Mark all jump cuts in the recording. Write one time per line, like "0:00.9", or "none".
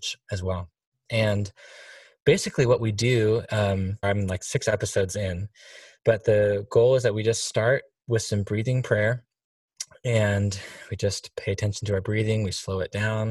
0:01.1
0:04.0